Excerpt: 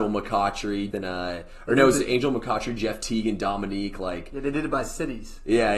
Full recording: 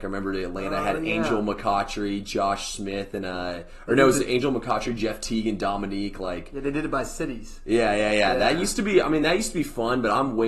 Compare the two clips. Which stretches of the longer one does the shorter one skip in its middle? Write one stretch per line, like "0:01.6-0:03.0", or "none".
0:02.2-0:03.1